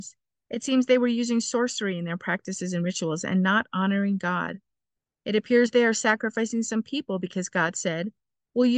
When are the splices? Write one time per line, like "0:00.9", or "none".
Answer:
none